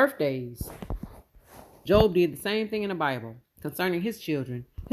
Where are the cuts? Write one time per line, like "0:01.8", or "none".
0:01.9